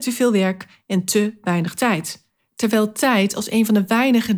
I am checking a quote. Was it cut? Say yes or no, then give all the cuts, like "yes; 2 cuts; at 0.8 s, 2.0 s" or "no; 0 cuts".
no; 0 cuts